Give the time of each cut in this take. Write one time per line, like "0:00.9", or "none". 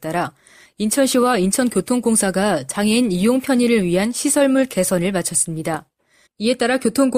0:06.3